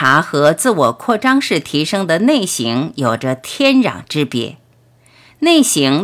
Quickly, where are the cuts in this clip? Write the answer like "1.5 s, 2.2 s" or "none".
none